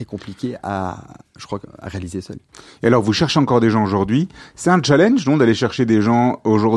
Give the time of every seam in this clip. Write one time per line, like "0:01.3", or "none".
none